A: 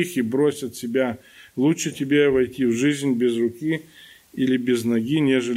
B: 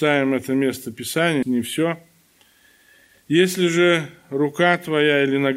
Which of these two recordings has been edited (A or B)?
B